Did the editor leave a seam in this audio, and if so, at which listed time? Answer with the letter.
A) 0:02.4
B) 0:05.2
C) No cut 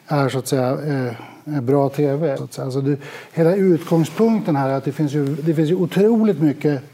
A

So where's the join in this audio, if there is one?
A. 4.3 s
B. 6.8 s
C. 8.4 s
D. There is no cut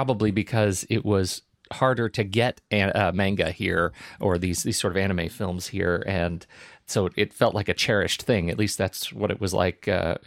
D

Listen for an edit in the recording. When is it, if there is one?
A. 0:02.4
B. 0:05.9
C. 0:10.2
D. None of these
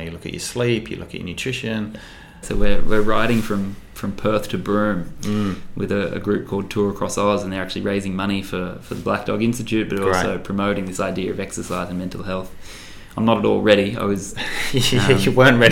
A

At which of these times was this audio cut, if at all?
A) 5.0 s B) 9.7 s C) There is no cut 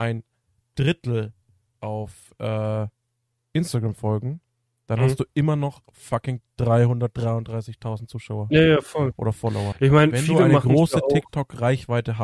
B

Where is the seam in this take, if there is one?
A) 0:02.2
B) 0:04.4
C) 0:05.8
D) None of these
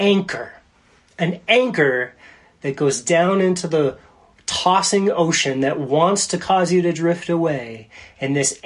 D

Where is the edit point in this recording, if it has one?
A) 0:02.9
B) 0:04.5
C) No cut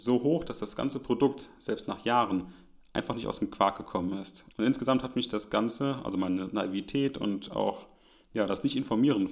B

